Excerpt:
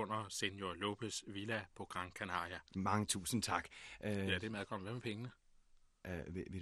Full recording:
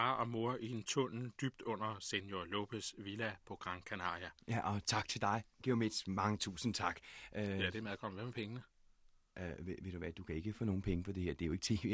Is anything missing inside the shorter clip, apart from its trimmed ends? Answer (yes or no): yes